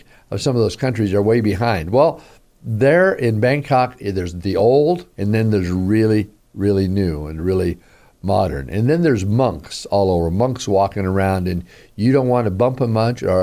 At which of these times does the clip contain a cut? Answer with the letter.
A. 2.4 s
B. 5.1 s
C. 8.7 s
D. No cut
B